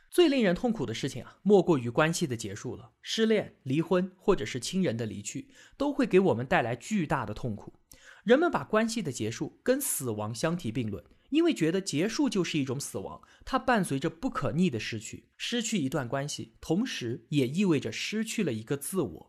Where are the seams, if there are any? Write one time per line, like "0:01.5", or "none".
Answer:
0:15.3